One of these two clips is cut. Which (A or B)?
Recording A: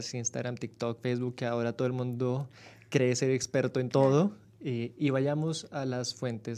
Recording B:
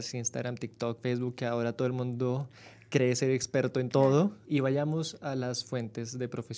B